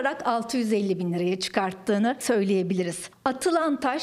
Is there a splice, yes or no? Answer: no